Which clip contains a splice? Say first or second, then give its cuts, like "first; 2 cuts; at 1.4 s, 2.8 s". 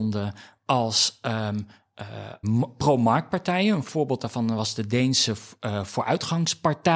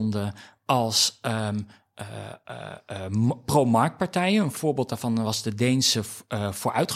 first; 1 cut; at 2.4 s